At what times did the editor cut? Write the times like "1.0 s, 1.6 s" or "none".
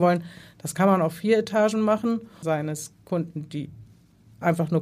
2.4 s